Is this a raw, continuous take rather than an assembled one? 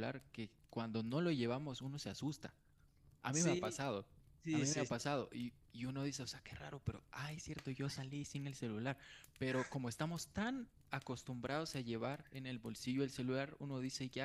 yes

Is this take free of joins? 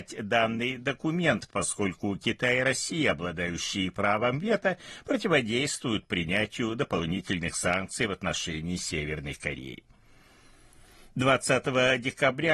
yes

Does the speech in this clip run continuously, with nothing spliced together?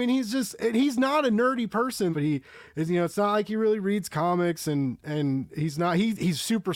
no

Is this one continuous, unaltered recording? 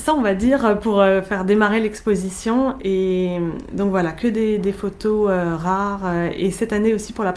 yes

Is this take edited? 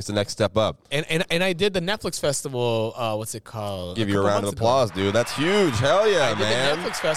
no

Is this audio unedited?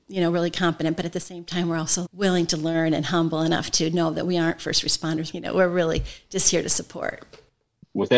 no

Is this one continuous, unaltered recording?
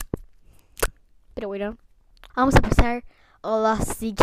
no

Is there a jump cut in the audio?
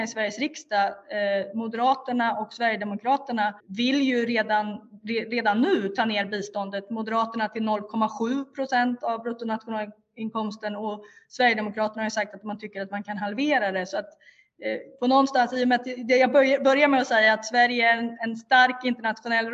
yes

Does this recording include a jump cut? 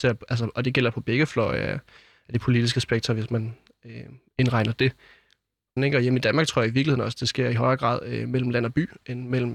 yes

